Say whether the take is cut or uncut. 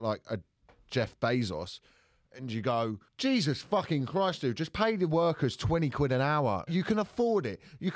cut